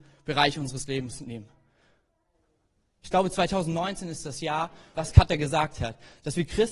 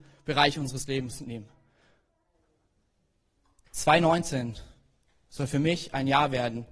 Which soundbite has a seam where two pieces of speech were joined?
first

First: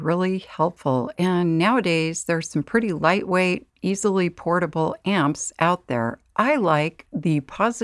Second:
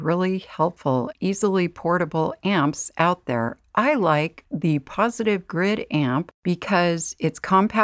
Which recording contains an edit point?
second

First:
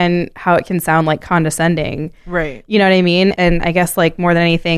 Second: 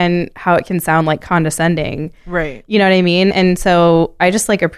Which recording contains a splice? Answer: first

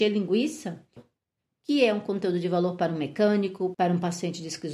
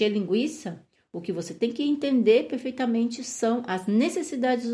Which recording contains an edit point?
first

